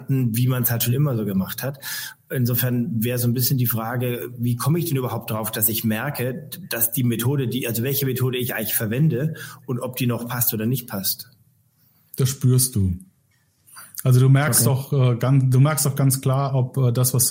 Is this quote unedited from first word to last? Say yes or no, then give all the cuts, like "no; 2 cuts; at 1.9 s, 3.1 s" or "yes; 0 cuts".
yes; 0 cuts